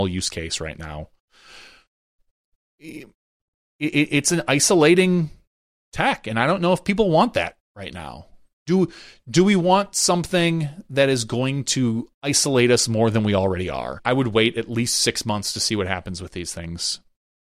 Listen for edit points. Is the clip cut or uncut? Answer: cut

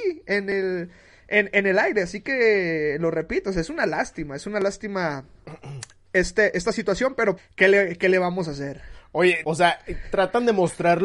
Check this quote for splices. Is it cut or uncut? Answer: cut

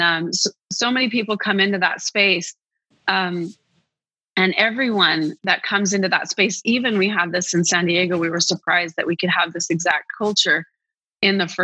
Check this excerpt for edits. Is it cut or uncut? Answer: cut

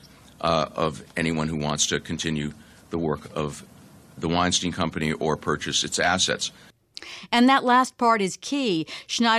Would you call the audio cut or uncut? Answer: uncut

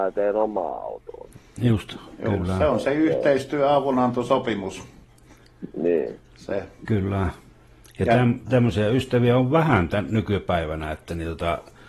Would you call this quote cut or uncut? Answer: uncut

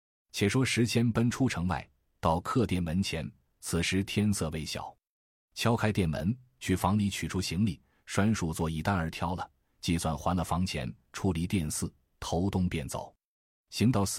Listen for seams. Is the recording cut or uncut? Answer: uncut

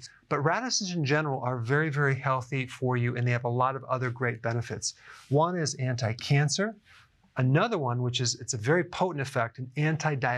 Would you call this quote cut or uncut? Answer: uncut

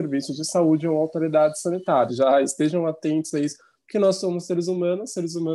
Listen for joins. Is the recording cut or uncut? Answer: cut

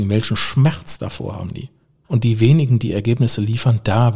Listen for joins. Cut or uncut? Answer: cut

